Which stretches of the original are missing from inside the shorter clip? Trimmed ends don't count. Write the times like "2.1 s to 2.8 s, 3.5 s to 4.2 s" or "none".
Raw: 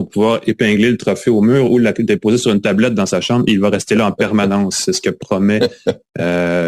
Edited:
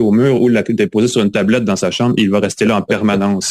none